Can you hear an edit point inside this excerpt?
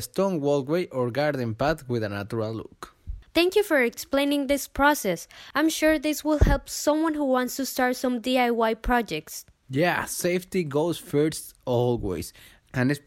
yes; 2 cuts; at 3.3 s, 9.6 s

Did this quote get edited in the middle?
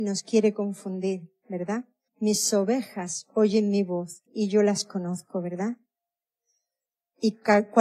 yes; 2 cuts; at 2.1 s, 4.3 s

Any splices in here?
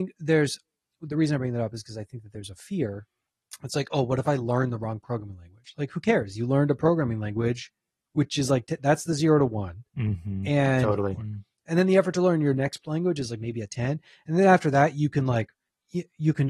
yes; 2 cuts; at 9.9 s, 11.2 s

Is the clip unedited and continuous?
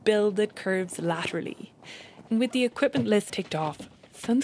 no; 2 cuts; at 2.3 s, 3.3 s

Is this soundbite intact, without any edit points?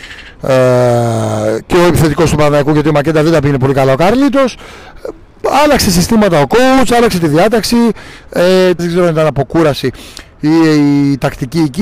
no; 1 cut; at 8.8 s

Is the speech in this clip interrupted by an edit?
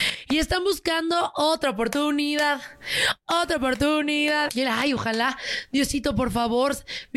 yes; 1 cut; at 4.5 s

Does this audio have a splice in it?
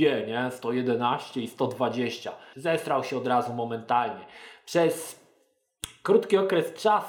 yes; 1 cut; at 2.5 s

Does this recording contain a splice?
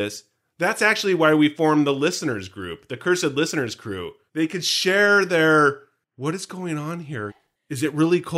yes; 2 cuts; at 4.3 s, 7.3 s

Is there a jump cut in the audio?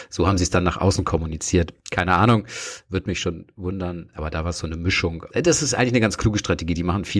no; 0 cuts

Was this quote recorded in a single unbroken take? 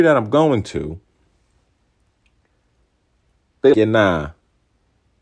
no; 1 cut; at 3.7 s

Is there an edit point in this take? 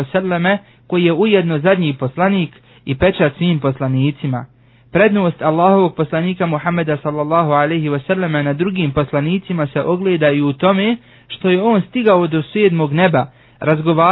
no; 0 cuts

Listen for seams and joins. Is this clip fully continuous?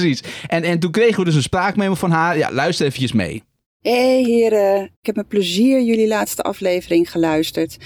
yes; 0 cuts

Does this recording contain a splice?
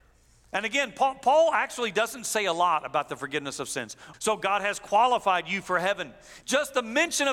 yes; 2 cuts; at 4.1 s, 6.4 s

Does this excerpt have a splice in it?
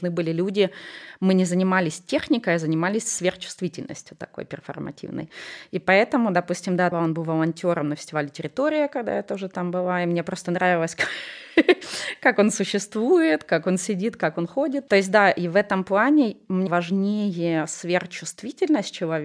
yes; 3 cuts; at 6.9 s, 14.9 s, 16.7 s

